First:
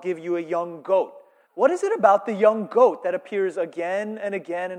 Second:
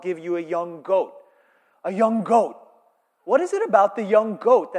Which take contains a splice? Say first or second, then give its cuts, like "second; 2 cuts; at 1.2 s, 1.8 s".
first; 1 cut; at 1.4 s